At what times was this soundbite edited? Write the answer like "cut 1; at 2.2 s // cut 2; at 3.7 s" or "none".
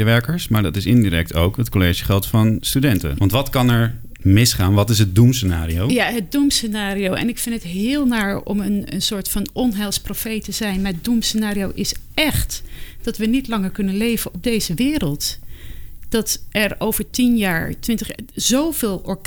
cut 1; at 3.2 s